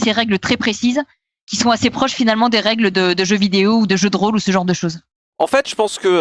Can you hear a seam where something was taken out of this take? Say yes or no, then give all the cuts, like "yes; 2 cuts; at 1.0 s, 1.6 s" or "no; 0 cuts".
no; 0 cuts